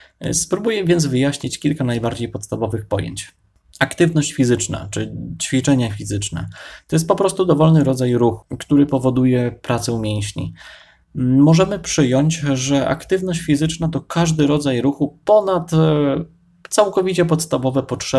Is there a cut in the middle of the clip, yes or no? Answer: no